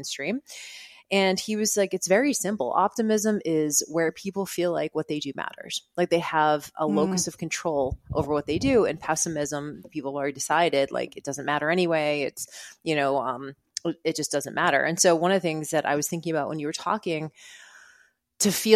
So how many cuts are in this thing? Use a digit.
0